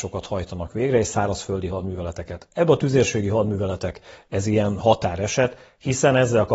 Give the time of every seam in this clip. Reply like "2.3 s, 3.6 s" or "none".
none